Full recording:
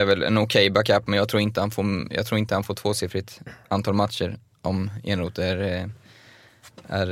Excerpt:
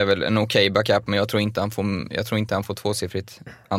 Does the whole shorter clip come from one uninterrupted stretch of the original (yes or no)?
yes